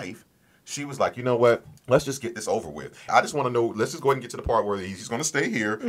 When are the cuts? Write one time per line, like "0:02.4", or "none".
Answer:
0:01.8
0:03.1